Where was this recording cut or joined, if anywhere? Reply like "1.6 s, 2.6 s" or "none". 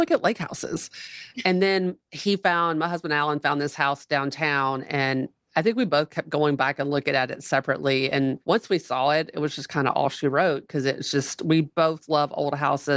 none